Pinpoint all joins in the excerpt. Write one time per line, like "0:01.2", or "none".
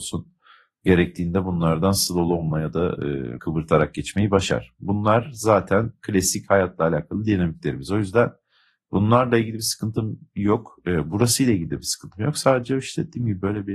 0:03.4